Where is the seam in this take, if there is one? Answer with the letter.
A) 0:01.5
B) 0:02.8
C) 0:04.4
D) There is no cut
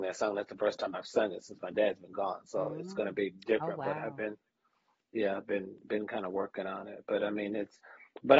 D